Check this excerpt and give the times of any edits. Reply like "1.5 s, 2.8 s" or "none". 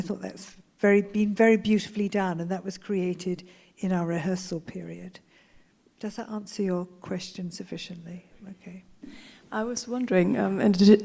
9.0 s

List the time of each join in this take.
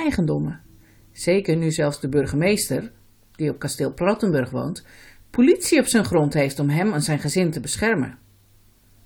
none

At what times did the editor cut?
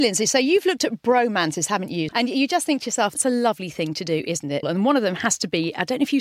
2.1 s, 3.1 s, 4.6 s

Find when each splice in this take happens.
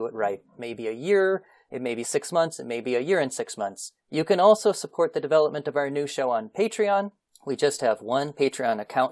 4.0 s

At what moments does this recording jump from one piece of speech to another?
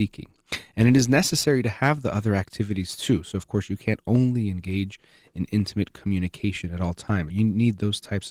7.3 s

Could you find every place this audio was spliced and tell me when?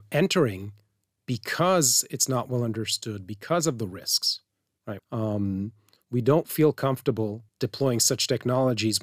5.0 s, 7.5 s

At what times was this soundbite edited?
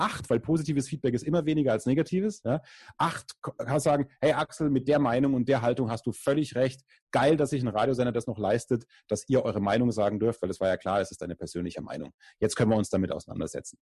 none

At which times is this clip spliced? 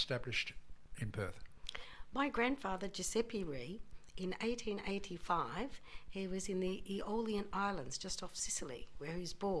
none

